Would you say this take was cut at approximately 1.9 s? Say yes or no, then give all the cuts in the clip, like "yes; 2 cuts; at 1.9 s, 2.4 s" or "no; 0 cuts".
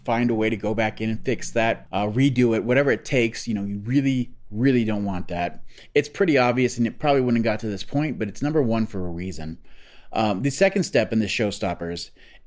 yes; 1 cut; at 1.9 s